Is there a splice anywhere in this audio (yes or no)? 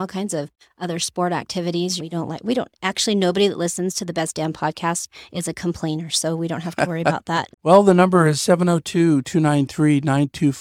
yes